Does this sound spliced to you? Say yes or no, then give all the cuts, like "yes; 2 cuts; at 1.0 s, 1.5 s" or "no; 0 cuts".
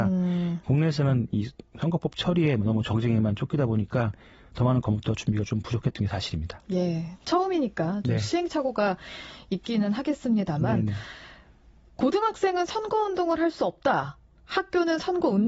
no; 0 cuts